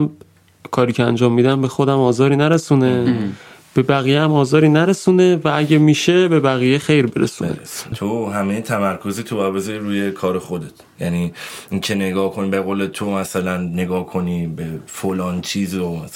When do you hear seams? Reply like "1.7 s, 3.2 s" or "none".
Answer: 7.9 s